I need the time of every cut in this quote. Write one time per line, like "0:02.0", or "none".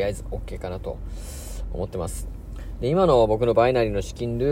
none